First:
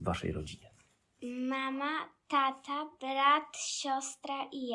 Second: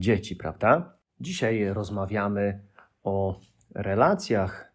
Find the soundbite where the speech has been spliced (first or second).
second